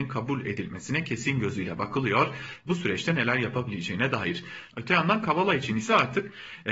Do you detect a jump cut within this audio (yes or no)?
yes